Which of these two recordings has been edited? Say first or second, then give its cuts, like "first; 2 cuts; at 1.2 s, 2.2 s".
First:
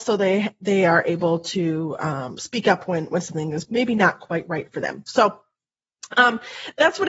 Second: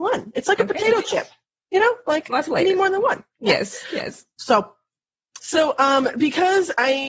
second; 2 cuts; at 4.4 s, 5.4 s